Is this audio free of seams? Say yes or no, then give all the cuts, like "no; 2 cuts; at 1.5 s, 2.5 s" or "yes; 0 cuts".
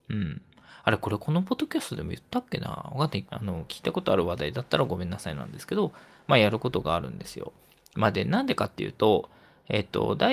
no; 1 cut; at 3.2 s